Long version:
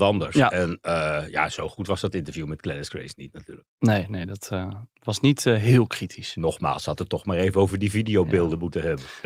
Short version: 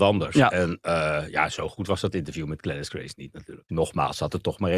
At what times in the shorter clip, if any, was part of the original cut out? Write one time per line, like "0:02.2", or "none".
0:03.7